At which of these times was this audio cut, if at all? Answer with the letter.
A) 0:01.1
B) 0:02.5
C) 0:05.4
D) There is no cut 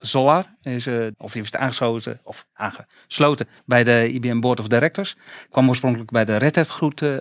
A